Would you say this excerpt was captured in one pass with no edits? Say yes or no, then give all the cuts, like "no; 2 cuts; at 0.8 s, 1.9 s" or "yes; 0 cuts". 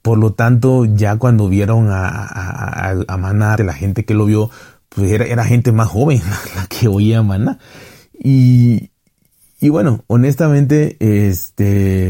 no; 1 cut; at 3.6 s